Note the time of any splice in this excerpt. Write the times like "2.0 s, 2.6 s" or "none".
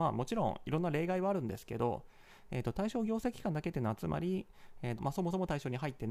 5.0 s